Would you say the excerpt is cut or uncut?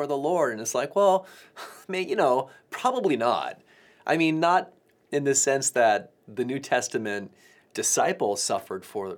cut